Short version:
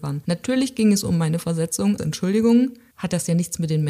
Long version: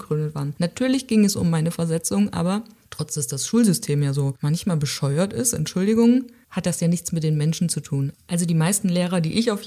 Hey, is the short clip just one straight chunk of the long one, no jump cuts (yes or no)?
no